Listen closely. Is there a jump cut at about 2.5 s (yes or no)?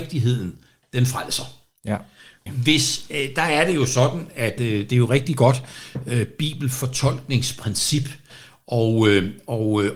yes